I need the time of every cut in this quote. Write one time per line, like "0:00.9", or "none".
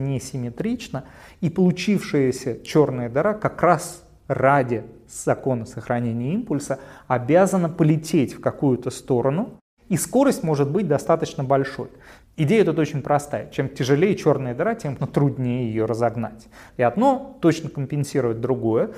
0:12.2
0:15.0
0:16.7